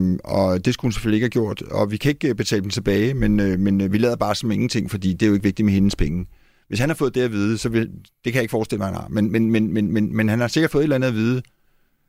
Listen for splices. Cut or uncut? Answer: uncut